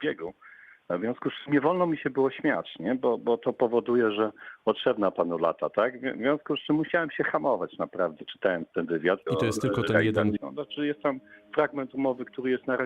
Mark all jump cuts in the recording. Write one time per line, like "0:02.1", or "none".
0:09.3
0:10.4